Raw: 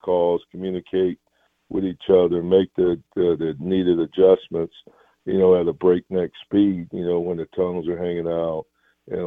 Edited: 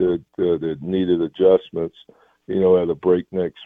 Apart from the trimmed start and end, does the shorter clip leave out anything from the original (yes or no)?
no